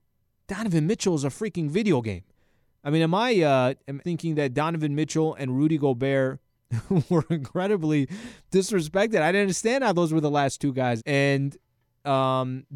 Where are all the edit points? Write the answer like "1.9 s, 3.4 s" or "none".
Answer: 4.0 s, 11.0 s

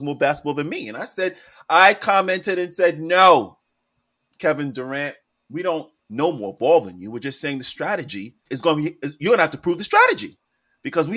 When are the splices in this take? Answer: 6.0 s, 8.4 s

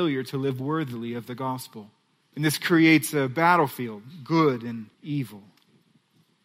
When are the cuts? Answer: 2.3 s, 4.9 s

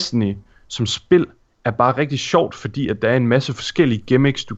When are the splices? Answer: none

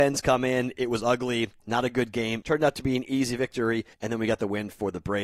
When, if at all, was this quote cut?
2.4 s, 3.9 s

